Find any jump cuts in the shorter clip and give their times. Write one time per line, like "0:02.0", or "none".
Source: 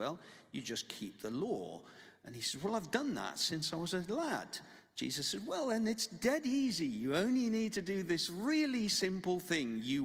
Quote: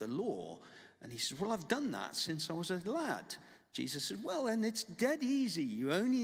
none